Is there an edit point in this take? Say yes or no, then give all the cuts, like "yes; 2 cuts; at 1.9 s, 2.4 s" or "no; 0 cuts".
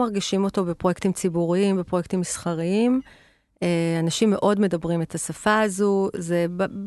no; 0 cuts